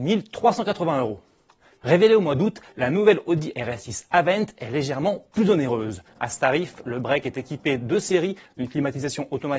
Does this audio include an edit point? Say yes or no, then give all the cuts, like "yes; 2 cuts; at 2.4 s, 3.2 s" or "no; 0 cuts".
yes; 1 cut; at 6.1 s